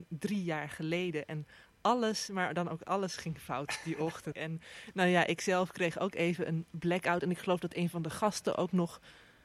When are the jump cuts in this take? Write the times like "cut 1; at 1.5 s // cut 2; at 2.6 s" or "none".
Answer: cut 1; at 4.3 s